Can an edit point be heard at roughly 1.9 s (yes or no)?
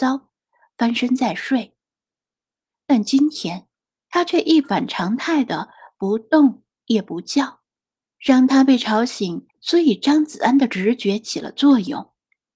no